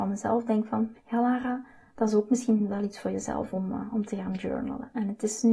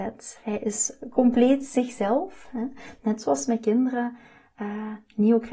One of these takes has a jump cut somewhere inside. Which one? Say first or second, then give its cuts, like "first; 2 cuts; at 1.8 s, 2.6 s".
first; 1 cut; at 0.9 s